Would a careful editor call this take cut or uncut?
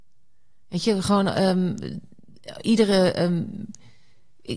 uncut